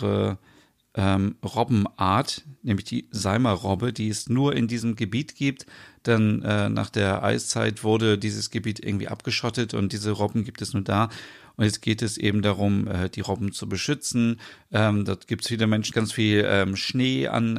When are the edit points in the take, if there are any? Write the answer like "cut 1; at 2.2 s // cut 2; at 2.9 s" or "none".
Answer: cut 1; at 15.9 s